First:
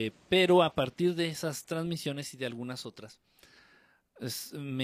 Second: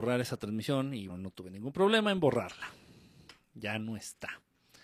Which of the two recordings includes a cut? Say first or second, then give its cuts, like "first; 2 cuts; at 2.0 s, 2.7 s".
second; 1 cut; at 1.1 s